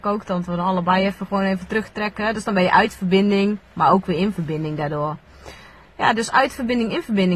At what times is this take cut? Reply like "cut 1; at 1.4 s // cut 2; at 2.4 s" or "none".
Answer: none